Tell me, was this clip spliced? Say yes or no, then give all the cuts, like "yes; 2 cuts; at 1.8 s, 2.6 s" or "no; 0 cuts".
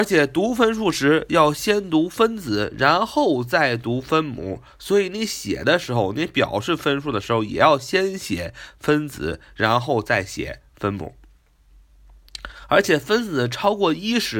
no; 0 cuts